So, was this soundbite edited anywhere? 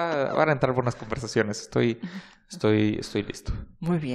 no; 0 cuts

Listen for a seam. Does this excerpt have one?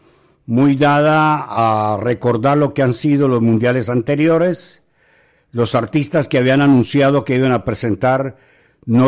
no; 0 cuts

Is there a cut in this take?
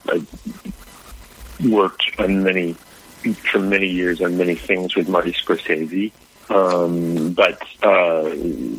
yes; 1 cut; at 7.7 s

